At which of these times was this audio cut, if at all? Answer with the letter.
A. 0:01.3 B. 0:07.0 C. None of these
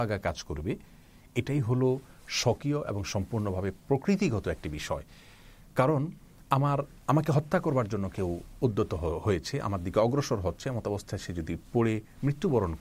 B